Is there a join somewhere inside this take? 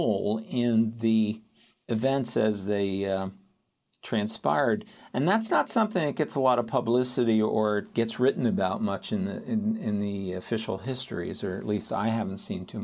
no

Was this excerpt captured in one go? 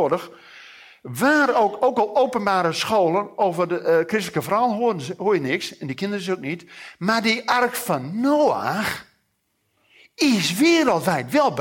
yes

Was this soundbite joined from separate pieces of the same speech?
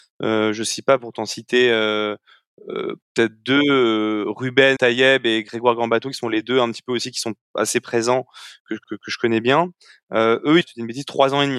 yes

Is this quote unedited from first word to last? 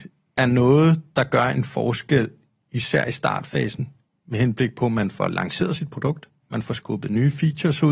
yes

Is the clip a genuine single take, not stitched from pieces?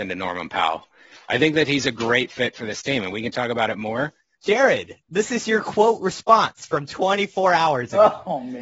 no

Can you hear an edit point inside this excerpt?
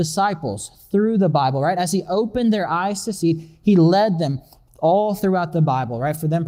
no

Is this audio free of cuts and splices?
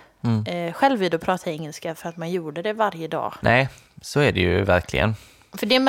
no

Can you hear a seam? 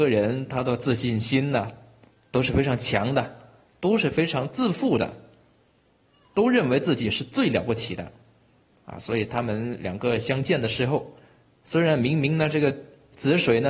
no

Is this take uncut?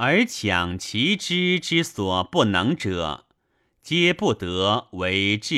yes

